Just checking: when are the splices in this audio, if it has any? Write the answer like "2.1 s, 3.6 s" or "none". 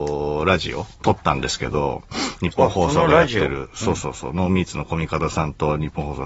0.9 s